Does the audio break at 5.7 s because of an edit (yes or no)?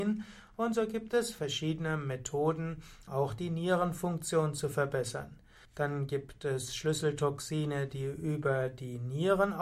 yes